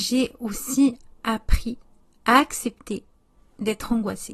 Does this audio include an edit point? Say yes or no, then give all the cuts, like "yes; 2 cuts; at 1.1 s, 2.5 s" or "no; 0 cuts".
no; 0 cuts